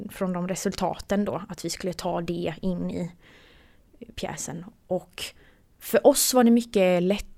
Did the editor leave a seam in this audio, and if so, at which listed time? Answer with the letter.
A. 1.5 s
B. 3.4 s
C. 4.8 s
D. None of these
D